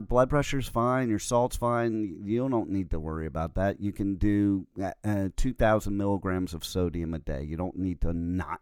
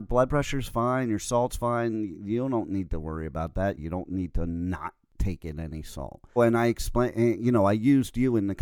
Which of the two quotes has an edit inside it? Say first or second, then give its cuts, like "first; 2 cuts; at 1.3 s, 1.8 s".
second; 2 cuts; at 3.8 s, 6.4 s